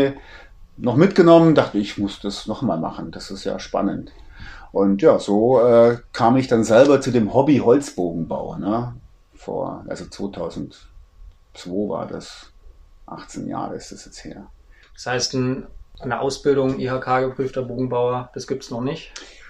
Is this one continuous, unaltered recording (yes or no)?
yes